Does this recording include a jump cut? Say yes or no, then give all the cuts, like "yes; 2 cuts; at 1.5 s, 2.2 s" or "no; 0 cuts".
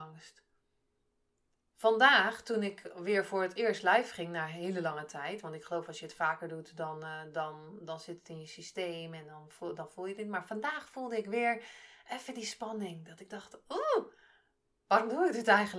no; 0 cuts